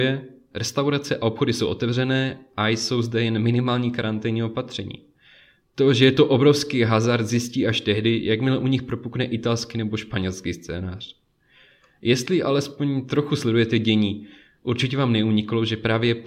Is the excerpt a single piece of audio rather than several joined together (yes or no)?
yes